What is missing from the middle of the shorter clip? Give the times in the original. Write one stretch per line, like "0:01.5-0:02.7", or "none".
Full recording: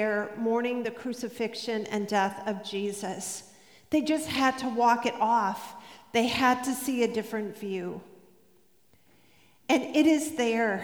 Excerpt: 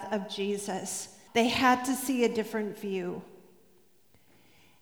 0:03.6-0:06.1